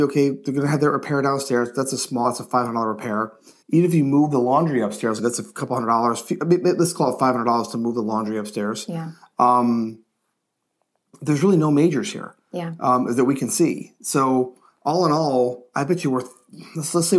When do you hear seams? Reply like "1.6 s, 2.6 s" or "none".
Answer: 3.6 s, 5.2 s